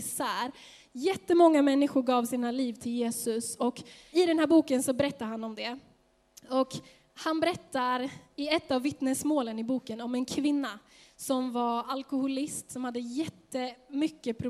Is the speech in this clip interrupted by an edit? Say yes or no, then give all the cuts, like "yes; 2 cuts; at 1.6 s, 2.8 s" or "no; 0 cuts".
yes; 1 cut; at 4.1 s